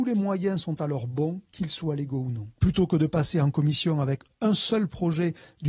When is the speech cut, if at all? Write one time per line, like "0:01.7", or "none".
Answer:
0:02.6